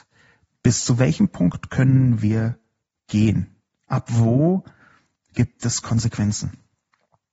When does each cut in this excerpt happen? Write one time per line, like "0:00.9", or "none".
none